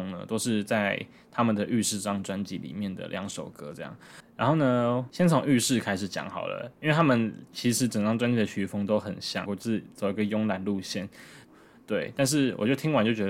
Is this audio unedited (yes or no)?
no